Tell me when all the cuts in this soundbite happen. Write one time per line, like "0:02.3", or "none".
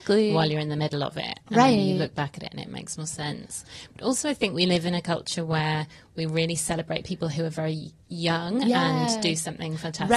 none